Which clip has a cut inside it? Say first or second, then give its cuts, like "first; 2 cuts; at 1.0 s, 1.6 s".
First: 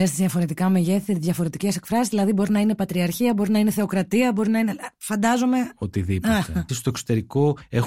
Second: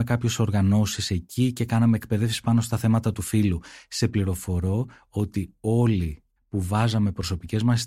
first; 1 cut; at 6.7 s